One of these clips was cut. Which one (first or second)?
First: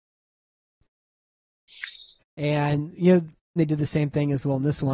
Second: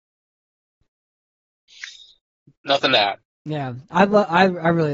first